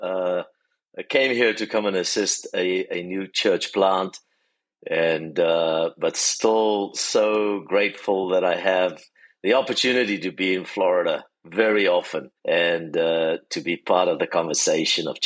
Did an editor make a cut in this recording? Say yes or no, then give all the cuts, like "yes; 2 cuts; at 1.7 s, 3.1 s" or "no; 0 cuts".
yes; 1 cut; at 12.4 s